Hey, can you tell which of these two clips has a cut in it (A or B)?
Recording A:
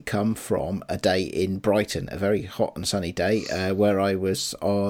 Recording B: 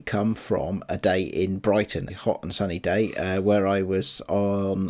B